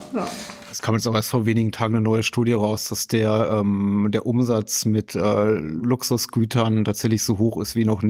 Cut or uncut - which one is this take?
uncut